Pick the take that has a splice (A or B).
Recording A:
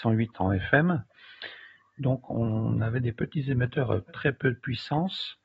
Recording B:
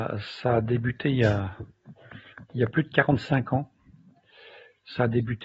A